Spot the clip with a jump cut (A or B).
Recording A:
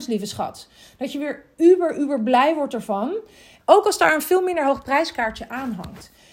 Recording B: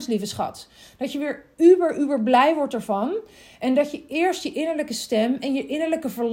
A